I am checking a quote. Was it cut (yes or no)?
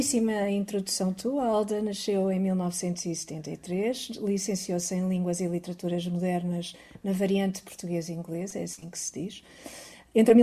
no